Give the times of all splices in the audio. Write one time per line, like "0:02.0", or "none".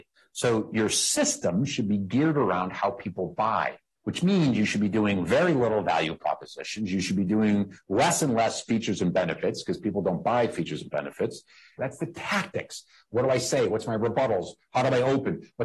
0:11.8